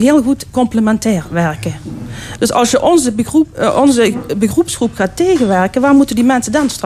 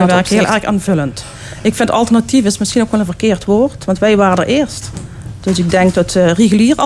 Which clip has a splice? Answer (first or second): first